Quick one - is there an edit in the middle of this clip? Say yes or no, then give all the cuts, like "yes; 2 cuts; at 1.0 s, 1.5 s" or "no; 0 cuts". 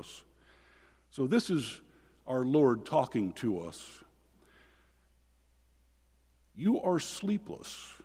no; 0 cuts